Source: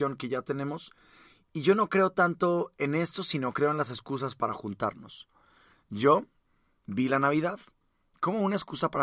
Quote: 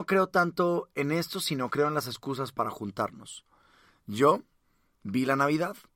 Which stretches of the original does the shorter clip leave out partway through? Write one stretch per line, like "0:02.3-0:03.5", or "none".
none